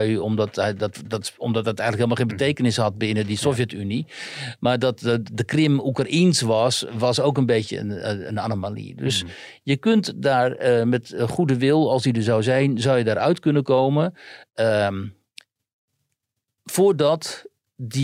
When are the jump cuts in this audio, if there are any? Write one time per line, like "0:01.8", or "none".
none